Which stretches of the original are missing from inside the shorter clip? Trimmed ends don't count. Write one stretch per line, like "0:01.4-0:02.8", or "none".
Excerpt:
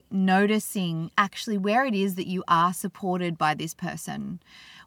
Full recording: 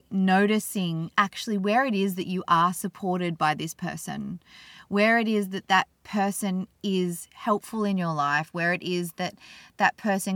none